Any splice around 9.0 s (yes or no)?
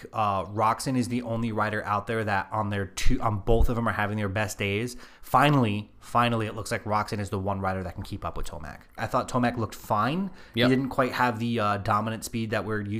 yes